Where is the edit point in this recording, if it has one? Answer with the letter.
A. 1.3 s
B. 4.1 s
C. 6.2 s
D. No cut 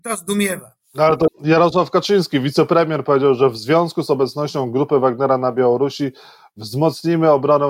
A